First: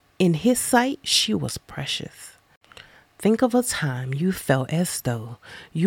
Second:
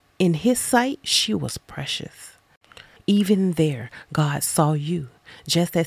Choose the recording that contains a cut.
second; 1 cut; at 3.0 s

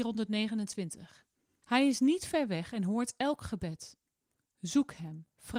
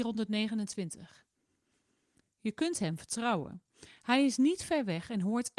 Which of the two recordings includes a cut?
first; 1 cut; at 1.6 s

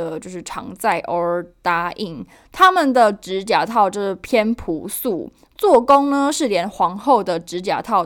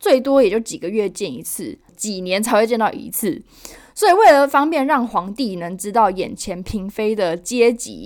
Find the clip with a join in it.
second; 1 cut; at 1.9 s

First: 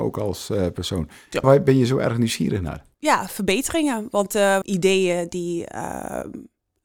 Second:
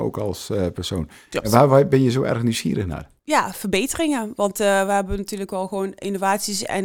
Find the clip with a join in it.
first; 2 cuts; at 1.4 s, 4.6 s

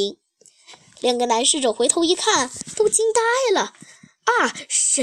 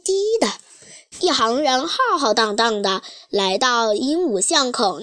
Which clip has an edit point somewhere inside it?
second; 1 cut; at 1.1 s

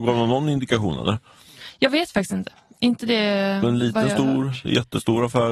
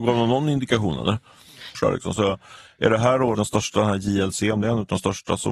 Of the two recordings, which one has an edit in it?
second; 2 cuts; at 1.7 s, 3.3 s

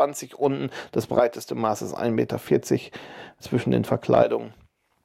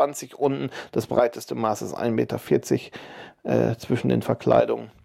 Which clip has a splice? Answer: first; 1 cut; at 3.4 s

